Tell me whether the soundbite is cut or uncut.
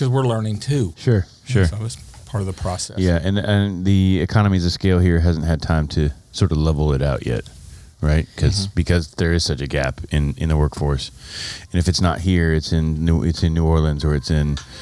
uncut